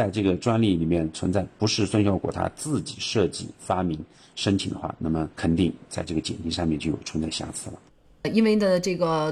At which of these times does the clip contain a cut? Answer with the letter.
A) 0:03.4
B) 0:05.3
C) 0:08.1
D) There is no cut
B